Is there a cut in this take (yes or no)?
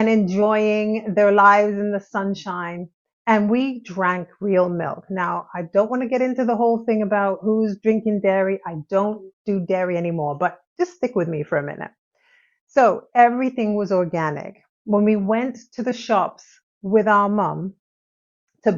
no